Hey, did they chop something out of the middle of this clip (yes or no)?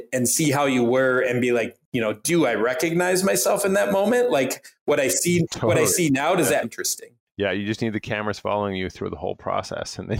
yes